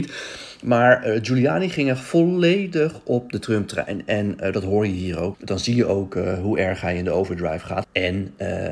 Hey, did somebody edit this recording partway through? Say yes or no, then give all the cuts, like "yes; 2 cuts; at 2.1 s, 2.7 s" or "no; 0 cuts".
yes; 2 cuts; at 5.3 s, 7.8 s